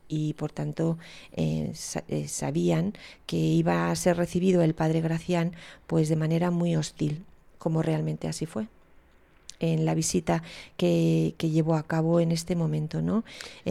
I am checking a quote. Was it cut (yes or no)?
no